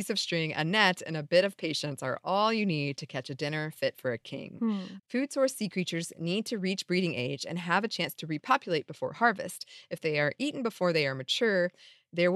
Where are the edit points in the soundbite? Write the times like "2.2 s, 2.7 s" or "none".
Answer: 5.0 s